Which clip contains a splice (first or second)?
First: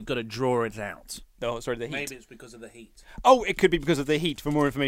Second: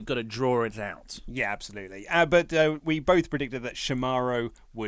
first